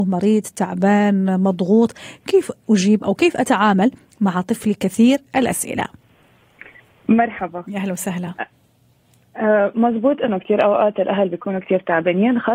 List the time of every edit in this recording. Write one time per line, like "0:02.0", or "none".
none